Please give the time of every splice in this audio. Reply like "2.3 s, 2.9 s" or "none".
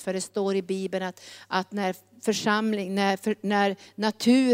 none